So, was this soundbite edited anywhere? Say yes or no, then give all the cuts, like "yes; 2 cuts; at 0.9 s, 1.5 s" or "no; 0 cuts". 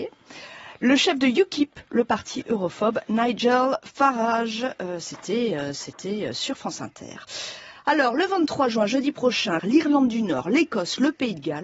yes; 1 cut; at 9.6 s